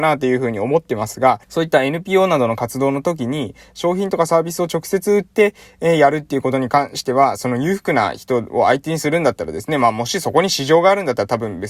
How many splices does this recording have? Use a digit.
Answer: 1